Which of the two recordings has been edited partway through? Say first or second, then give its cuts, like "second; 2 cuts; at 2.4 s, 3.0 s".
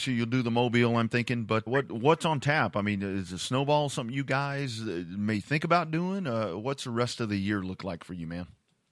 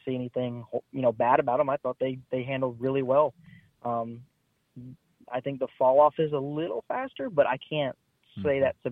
first; 1 cut; at 1.7 s